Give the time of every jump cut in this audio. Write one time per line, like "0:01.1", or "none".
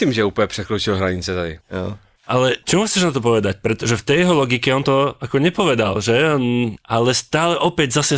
0:01.6